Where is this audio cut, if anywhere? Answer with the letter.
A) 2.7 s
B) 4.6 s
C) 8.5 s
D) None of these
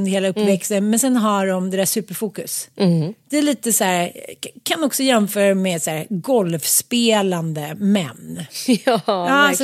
A